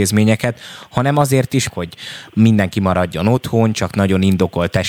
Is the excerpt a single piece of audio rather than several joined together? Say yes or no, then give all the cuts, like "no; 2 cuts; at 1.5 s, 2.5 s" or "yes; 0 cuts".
no; 1 cut; at 1.7 s